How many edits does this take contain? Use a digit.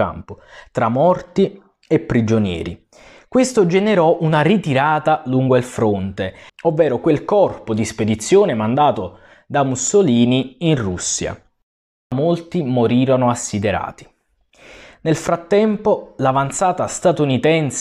1